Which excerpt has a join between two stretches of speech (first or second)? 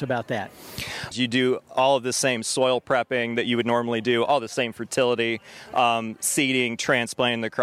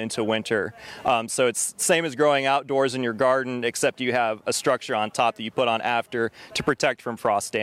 first